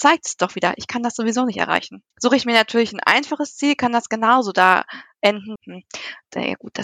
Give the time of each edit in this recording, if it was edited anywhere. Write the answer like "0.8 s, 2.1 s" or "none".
2.1 s, 5.6 s

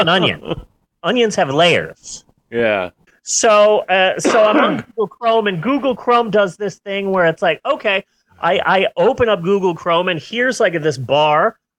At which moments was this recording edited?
3.1 s

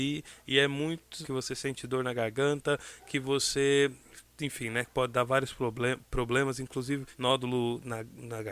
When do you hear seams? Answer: 1.2 s, 7.1 s

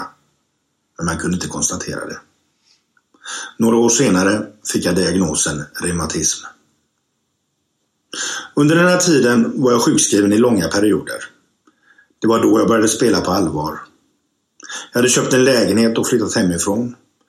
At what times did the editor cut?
none

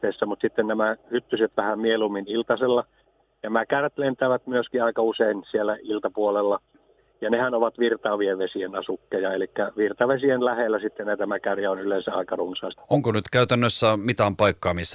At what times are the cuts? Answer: 12.8 s

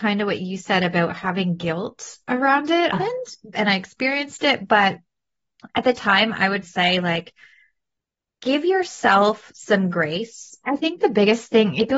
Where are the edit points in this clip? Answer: 2.9 s, 6.6 s, 10.6 s

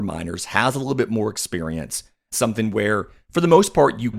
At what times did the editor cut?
none

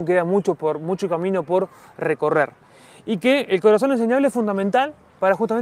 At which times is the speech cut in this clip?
none

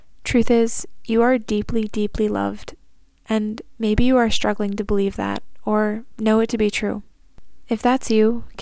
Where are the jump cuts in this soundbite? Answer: none

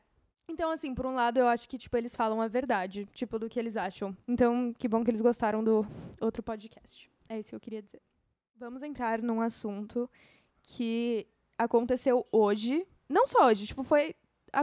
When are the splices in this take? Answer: none

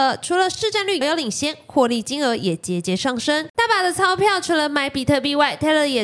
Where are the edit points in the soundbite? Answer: 1.0 s, 3.5 s

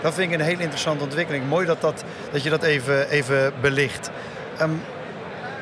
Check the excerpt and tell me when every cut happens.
none

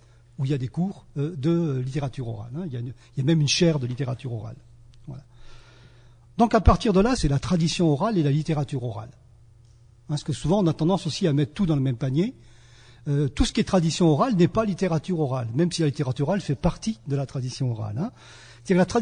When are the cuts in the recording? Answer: 7.2 s

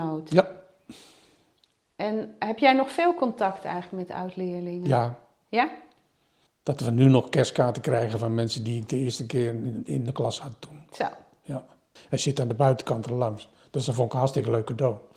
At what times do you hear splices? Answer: 6.5 s, 12.0 s

